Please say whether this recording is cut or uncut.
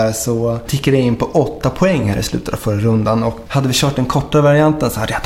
cut